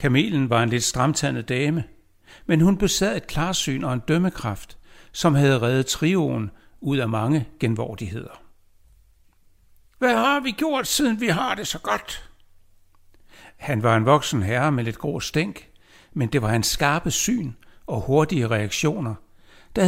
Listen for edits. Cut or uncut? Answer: cut